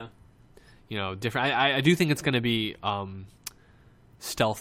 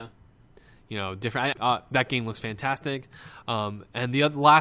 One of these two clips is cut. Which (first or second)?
second